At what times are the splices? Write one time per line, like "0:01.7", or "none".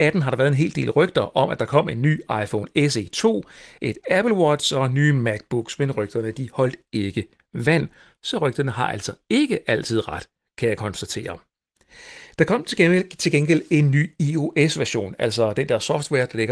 none